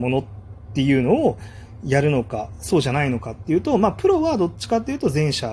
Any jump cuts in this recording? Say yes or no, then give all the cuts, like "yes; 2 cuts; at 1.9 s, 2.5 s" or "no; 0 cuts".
no; 0 cuts